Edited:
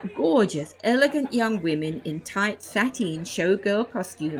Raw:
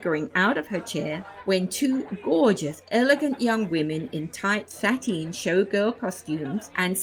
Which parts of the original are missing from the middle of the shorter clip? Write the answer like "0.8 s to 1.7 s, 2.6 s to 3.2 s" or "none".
none